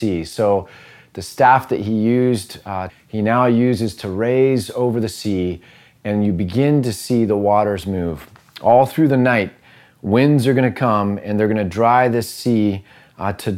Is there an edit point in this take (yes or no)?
yes